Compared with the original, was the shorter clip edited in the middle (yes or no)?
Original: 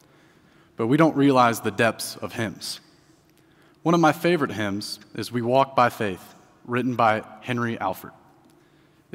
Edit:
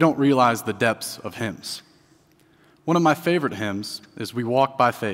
no